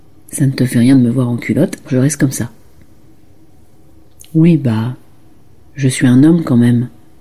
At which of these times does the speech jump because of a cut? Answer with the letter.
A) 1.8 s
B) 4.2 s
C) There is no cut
A